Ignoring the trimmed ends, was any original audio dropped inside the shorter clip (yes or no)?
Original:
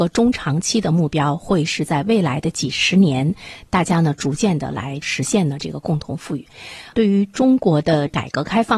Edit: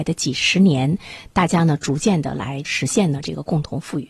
no